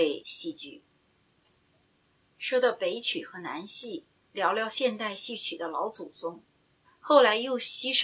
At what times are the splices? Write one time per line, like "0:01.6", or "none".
0:04.3
0:06.8